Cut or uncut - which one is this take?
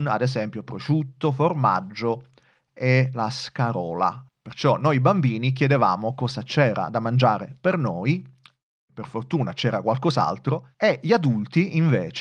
cut